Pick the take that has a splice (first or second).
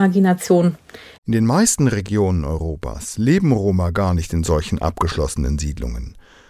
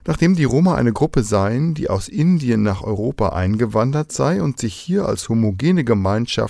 first